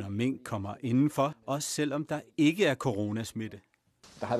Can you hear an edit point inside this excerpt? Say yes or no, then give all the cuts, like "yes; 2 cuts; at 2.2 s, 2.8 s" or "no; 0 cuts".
yes; 1 cut; at 1.3 s